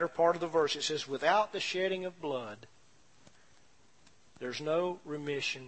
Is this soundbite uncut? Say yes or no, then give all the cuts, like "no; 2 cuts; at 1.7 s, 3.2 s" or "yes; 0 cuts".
yes; 0 cuts